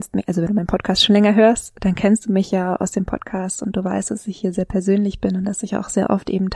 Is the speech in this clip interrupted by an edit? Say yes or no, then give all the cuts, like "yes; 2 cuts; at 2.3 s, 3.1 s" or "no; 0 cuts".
no; 0 cuts